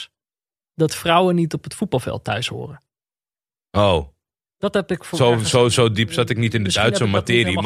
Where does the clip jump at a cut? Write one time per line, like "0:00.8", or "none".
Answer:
none